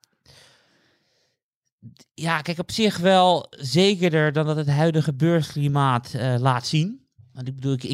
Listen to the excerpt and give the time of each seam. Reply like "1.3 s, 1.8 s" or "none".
none